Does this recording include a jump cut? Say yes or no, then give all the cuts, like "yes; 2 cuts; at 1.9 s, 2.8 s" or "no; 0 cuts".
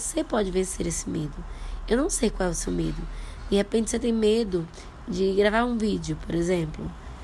no; 0 cuts